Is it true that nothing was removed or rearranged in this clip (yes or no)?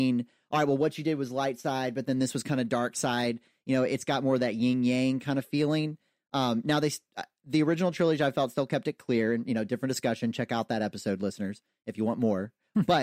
yes